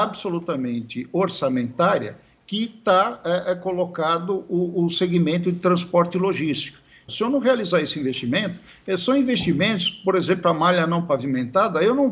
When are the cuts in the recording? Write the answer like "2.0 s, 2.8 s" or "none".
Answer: 7.1 s